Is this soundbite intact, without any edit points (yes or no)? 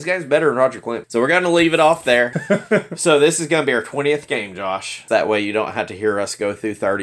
no